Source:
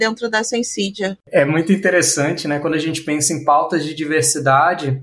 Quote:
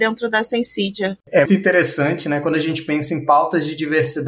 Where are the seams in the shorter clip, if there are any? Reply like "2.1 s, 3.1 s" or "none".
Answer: 1.5 s